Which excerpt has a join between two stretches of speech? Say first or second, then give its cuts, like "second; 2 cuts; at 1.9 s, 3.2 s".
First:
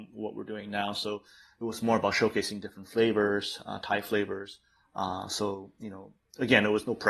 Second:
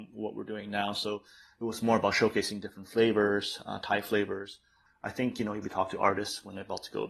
second; 1 cut; at 4.9 s